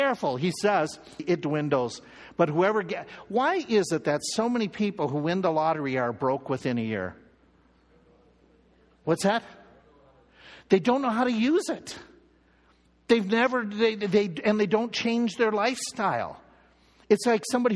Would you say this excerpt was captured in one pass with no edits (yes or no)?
no